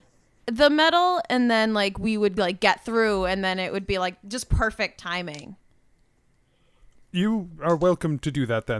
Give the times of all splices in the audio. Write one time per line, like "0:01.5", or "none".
none